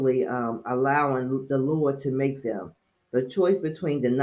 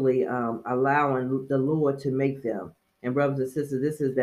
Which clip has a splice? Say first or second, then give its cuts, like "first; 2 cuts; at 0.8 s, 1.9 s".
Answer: first; 1 cut; at 2.9 s